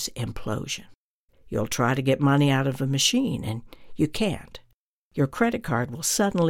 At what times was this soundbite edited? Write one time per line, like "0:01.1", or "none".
0:01.3